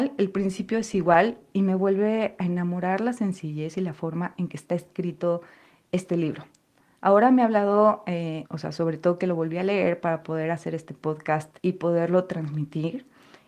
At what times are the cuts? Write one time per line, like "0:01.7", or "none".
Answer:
0:08.5
0:11.6